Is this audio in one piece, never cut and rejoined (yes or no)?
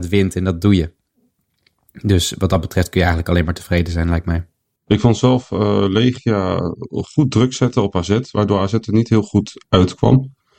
no